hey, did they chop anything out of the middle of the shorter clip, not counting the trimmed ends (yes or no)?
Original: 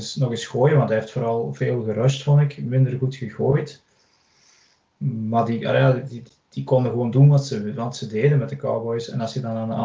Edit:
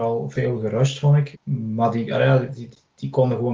yes